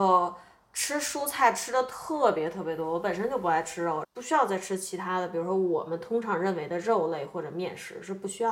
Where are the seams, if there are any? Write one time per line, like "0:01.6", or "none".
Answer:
0:04.0